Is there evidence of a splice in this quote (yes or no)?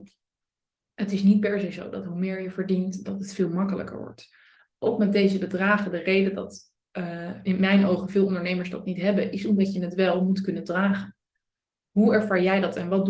yes